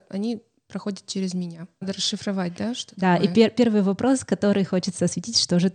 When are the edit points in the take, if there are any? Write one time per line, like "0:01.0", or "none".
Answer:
0:01.8